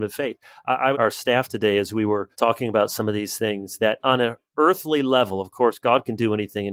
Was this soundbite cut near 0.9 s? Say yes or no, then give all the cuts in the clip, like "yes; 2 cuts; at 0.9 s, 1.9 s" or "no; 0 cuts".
yes; 2 cuts; at 0.9 s, 2.3 s